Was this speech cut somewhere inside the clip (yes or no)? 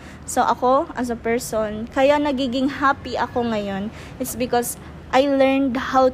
no